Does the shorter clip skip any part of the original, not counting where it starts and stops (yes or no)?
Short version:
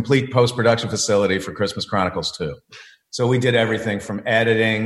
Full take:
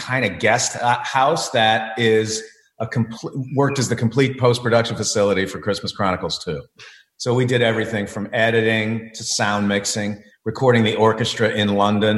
no